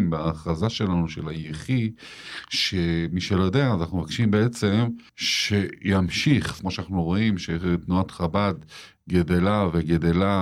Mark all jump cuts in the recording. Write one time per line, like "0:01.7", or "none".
0:05.1
0:06.6

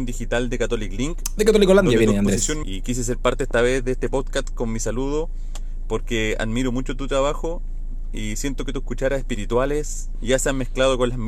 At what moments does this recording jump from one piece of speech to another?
0:02.6
0:10.1

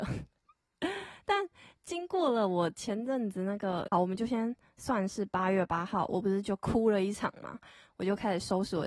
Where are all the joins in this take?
0:03.9

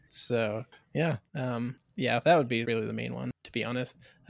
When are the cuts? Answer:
0:01.3
0:02.6

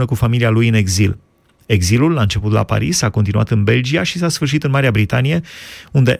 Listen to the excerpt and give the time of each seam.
none

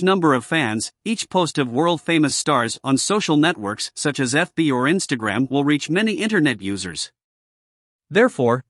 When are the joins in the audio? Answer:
none

